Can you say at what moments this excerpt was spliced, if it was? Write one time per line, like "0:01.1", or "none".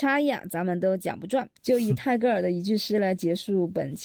none

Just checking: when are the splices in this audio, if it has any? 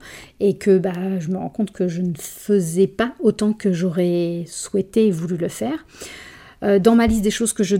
none

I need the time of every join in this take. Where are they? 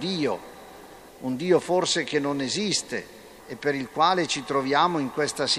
0:01.1
0:03.4

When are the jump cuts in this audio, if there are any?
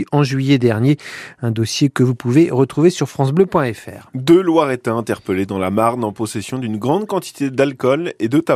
none

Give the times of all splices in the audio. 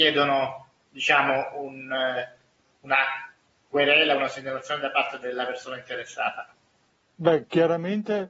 none

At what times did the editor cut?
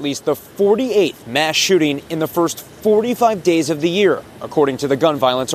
none

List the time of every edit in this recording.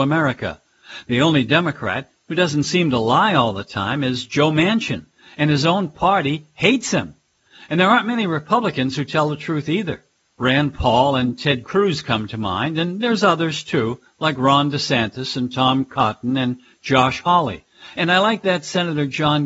none

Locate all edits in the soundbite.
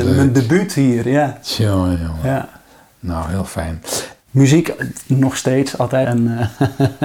0:01.9
0:04.2
0:06.0

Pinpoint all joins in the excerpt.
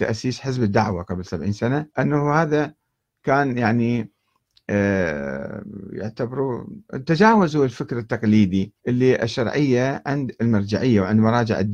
0:01.9
0:08.8

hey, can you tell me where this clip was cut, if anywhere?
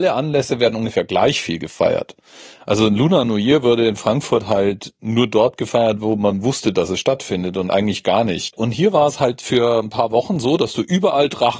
none

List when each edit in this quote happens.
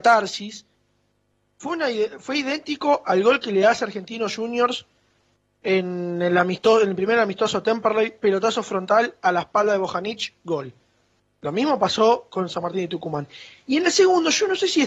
none

